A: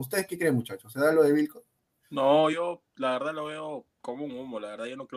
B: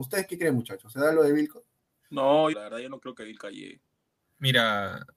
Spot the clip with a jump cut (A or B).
B